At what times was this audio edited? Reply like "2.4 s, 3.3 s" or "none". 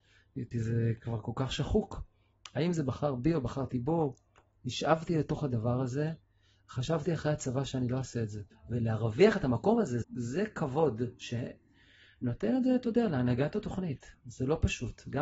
8.5 s, 10.0 s